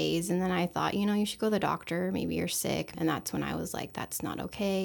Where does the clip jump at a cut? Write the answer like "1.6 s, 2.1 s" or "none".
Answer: 2.9 s